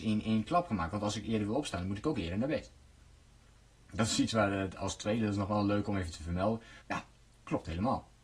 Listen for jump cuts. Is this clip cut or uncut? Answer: cut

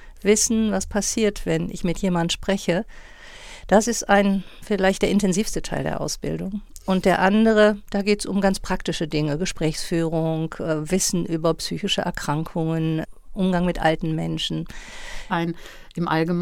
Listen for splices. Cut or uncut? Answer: cut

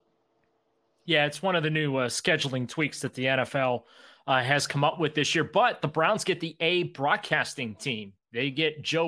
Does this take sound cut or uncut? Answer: uncut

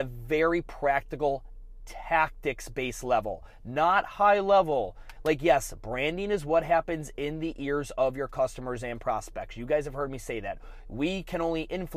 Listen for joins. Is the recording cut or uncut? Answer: uncut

